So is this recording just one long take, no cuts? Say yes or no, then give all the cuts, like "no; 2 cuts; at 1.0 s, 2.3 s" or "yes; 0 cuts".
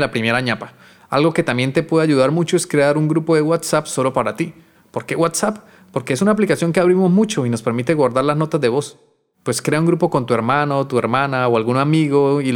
yes; 0 cuts